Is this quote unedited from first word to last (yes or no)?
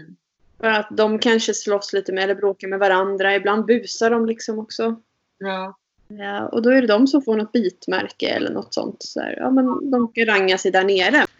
yes